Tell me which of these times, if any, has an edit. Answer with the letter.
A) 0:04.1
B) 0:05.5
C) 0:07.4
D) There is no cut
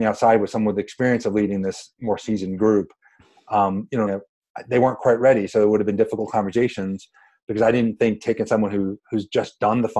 A